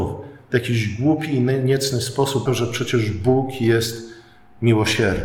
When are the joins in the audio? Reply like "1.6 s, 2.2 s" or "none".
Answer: 2.5 s